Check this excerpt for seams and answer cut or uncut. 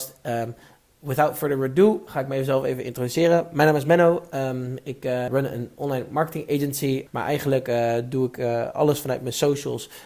cut